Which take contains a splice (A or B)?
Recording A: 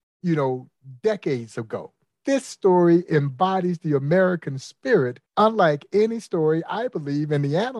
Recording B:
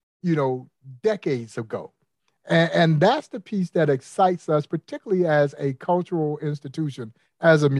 A